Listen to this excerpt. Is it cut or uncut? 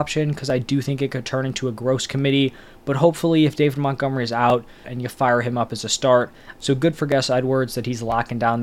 cut